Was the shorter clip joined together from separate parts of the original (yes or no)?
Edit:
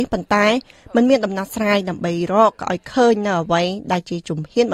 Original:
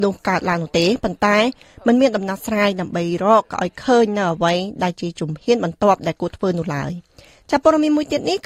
no